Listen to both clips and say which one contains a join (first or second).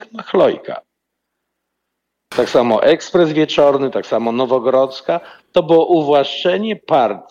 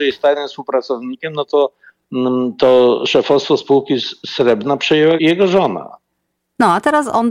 second